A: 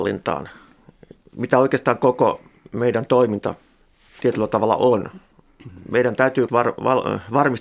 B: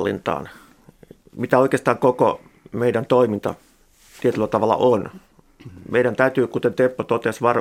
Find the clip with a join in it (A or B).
A